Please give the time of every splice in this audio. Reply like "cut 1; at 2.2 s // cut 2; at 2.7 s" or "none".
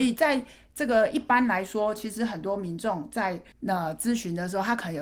cut 1; at 3.5 s